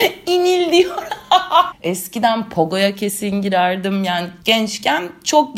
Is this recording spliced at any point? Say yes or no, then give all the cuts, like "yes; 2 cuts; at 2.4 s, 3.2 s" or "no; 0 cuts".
yes; 1 cut; at 1.7 s